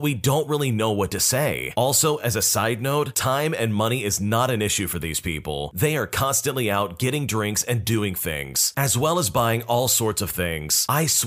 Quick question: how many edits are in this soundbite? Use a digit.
0